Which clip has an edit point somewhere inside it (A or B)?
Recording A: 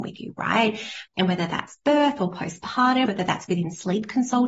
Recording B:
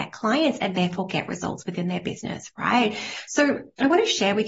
A